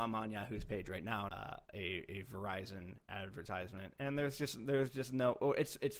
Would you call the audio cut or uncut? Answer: cut